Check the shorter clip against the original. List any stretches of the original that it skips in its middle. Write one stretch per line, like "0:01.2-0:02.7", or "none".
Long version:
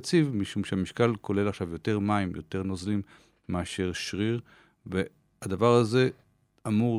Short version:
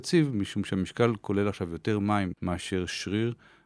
0:02.3-0:03.4